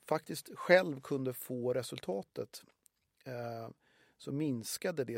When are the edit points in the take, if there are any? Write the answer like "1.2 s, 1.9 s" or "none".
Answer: none